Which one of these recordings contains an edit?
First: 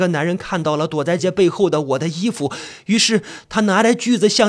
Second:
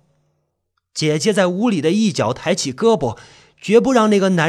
first; 1 cut; at 1.2 s

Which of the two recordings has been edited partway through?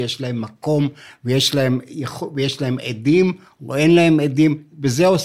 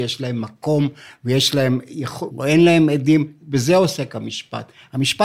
second; 1 cut; at 2.3 s

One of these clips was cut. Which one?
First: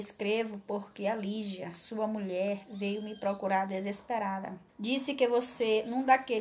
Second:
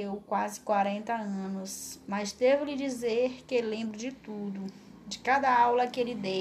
first; 1 cut; at 4.7 s

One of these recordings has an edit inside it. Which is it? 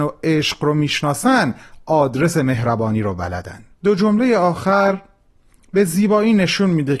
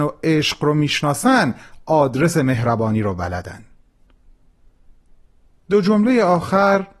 first; 1 cut; at 3.7 s

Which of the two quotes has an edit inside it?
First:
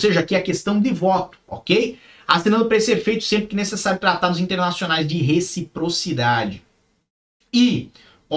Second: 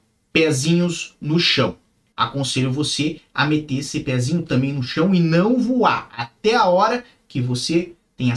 second; 1 cut; at 2.1 s

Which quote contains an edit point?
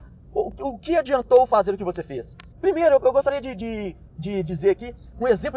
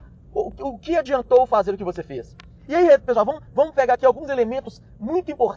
first; 1 cut; at 2.5 s

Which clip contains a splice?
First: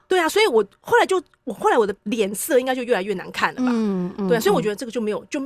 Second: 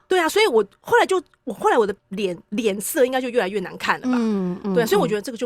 first; 1 cut; at 2.0 s

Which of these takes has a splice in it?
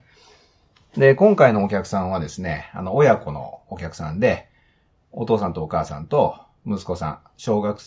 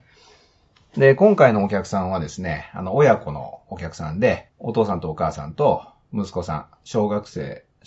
second; 1 cut; at 4.5 s

